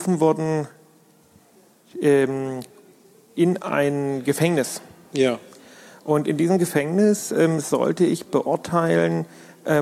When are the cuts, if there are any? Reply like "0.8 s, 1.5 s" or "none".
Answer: none